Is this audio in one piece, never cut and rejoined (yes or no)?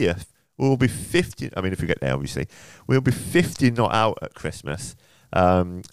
yes